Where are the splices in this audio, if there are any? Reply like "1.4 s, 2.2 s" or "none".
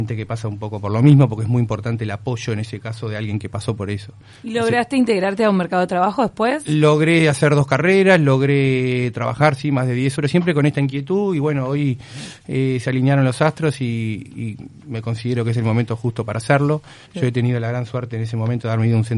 10.2 s, 17.1 s